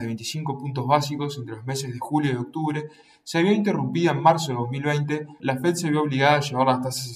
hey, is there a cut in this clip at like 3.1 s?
no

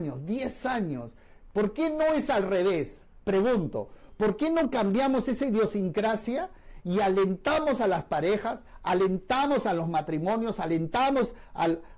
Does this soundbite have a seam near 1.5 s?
yes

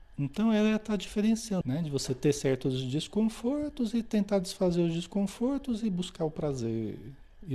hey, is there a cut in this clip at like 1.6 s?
yes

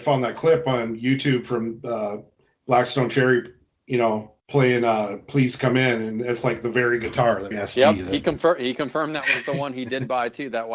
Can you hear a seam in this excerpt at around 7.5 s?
yes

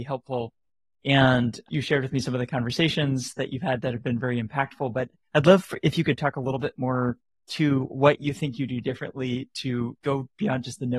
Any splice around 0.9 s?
no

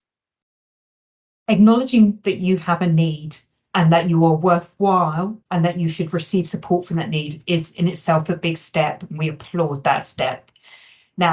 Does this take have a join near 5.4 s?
yes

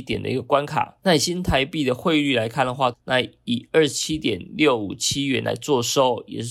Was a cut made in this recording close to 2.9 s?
yes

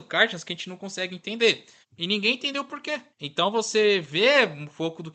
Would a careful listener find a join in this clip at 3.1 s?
yes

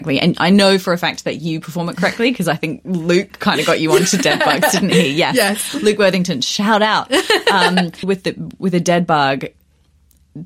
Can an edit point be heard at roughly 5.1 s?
no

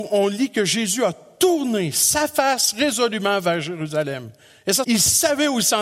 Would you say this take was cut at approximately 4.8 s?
yes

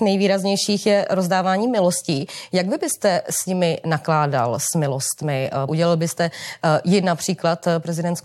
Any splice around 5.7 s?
yes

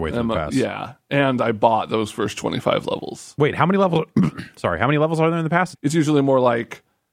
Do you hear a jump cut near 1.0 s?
no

